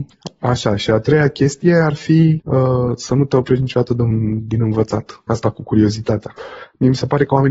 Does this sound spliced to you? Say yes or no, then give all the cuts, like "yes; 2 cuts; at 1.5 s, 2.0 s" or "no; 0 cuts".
no; 0 cuts